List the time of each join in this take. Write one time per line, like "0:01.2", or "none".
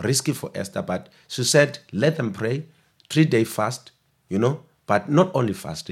none